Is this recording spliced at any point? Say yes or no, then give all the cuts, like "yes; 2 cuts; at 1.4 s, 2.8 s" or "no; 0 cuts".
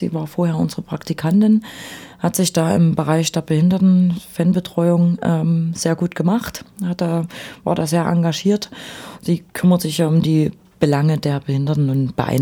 no; 0 cuts